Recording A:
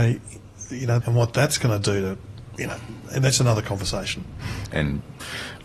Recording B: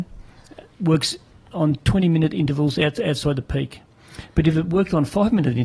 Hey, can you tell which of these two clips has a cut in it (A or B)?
A